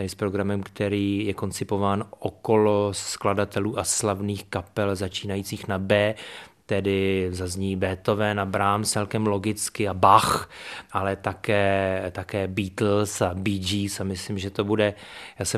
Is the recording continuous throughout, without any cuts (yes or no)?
yes